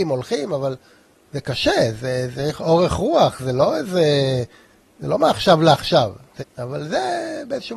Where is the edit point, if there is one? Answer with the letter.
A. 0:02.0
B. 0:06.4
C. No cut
B